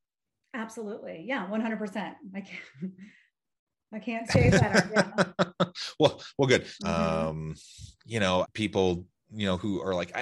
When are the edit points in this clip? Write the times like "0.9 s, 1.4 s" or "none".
6.8 s, 8.4 s